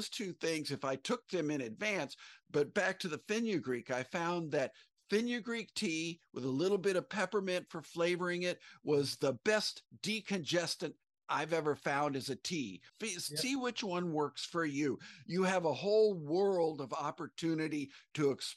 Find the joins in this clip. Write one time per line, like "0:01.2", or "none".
0:12.9